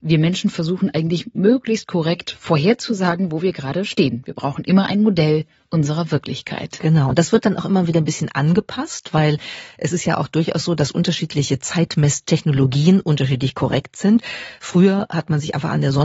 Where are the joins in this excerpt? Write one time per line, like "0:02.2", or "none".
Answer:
none